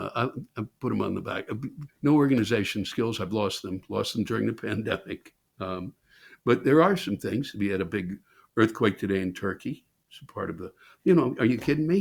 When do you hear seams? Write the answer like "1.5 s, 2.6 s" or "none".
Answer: 1.9 s

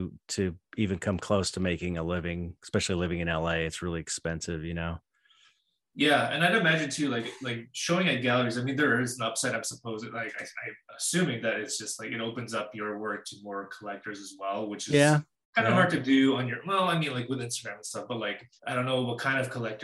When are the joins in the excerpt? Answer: 18.6 s

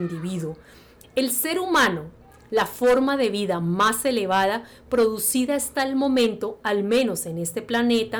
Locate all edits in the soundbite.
1.0 s

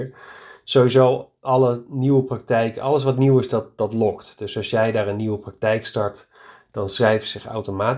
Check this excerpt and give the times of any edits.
none

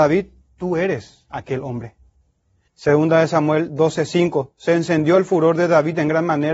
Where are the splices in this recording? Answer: 2.7 s

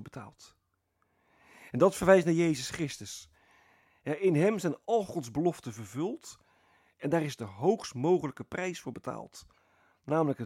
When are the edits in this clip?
none

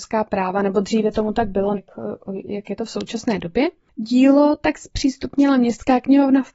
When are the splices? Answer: 1.8 s

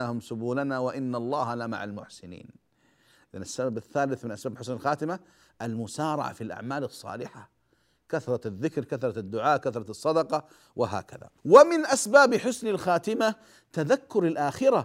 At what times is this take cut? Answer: 11.4 s

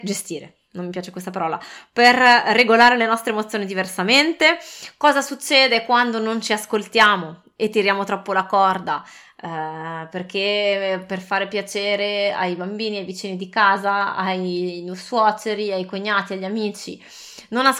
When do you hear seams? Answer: none

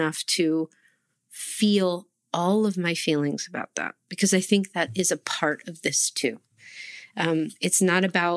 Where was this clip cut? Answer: none

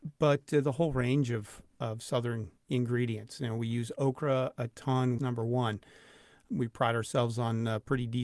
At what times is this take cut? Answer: 2.6 s, 5.2 s

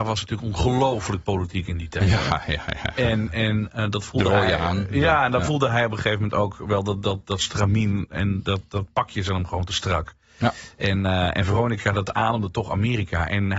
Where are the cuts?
none

